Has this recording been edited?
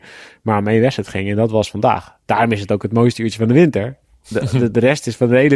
no; 0 cuts

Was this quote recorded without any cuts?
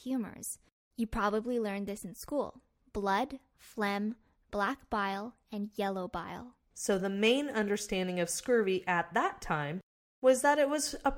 yes; 0 cuts

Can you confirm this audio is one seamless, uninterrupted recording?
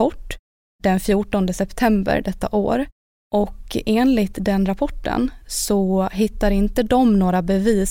yes; 0 cuts

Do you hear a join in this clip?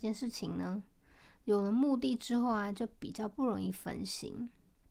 no; 0 cuts

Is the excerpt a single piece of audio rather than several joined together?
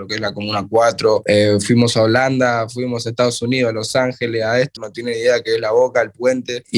no; 1 cut; at 4.8 s

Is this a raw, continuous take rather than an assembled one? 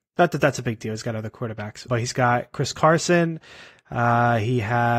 no; 1 cut; at 1.9 s

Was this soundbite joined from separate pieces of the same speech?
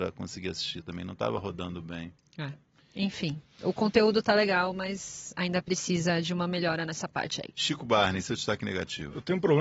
yes; 1 cut; at 7.5 s

